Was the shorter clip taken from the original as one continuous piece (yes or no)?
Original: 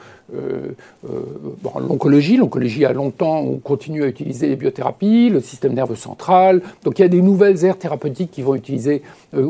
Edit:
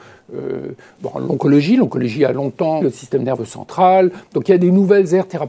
no